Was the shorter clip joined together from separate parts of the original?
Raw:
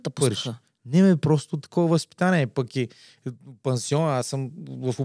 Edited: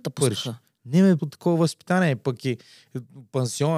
yes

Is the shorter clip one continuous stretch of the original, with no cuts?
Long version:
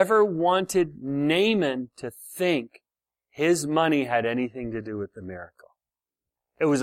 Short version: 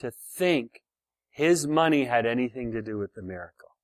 yes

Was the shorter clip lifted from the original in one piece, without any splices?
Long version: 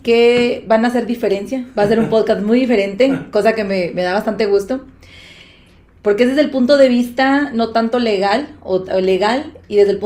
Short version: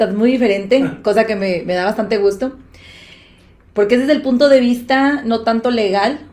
yes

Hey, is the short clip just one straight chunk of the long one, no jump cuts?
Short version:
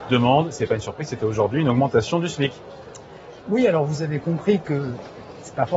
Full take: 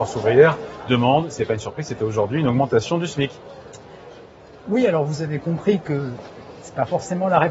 no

